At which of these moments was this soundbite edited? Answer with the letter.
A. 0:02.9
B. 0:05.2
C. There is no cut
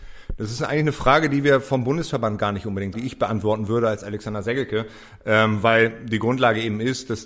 A